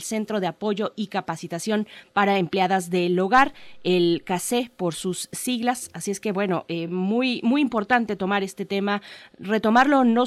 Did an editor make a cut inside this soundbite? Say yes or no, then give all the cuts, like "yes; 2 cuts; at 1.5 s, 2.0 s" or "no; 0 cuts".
no; 0 cuts